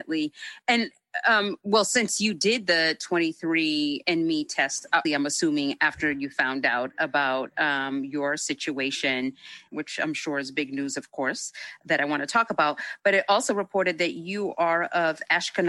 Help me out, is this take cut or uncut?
cut